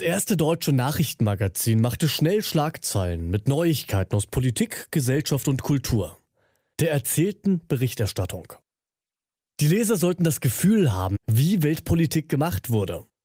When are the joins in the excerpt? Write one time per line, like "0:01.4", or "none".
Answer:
0:06.7
0:11.1